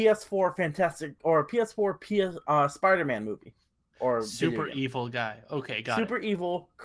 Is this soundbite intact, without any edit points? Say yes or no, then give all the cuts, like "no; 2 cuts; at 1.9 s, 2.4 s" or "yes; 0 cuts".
yes; 0 cuts